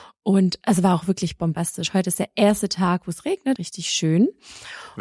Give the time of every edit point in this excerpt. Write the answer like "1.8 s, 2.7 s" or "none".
3.6 s